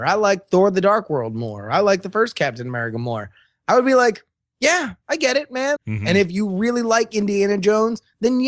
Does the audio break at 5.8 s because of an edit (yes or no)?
yes